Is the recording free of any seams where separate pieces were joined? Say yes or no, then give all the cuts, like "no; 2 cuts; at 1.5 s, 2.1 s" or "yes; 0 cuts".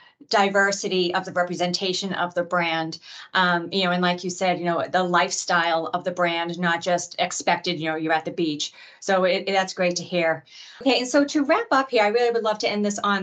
yes; 0 cuts